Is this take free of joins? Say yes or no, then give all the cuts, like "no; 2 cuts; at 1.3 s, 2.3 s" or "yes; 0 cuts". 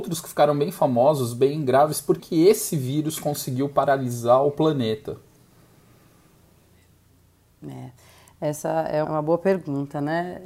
no; 2 cuts; at 2.2 s, 9.0 s